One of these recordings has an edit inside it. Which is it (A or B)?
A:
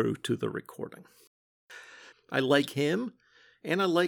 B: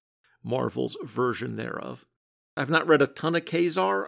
A